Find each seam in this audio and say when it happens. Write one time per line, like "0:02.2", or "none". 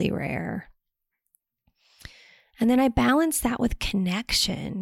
none